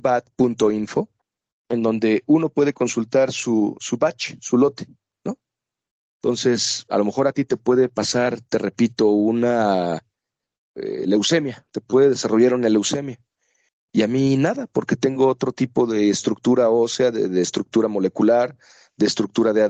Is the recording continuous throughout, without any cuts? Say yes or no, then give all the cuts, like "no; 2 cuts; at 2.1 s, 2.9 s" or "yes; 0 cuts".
no; 1 cut; at 6.1 s